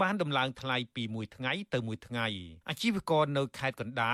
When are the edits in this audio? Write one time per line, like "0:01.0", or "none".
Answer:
0:02.6